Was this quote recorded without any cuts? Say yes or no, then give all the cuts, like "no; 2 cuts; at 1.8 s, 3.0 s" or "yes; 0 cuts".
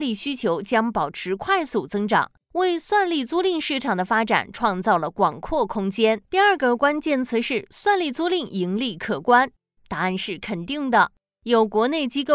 no; 2 cuts; at 6.2 s, 9.8 s